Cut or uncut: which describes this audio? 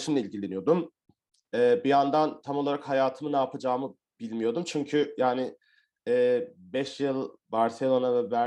cut